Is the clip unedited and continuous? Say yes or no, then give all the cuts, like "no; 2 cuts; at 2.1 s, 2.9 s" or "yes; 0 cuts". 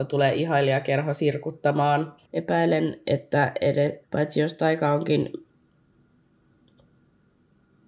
no; 2 cuts; at 2.2 s, 4.0 s